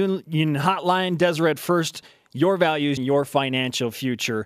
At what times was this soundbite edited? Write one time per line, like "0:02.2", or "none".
0:03.0